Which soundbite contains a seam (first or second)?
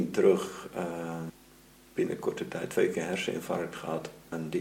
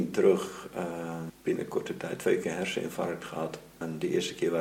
second